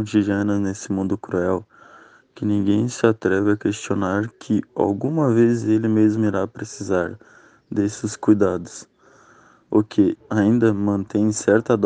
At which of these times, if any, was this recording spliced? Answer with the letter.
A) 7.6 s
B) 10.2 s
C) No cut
B